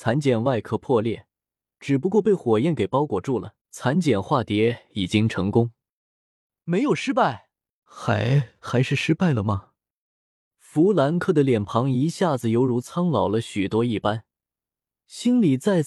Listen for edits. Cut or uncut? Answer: cut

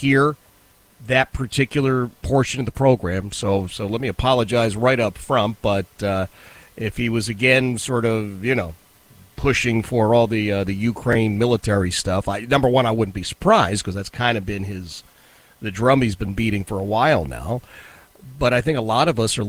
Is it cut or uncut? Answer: uncut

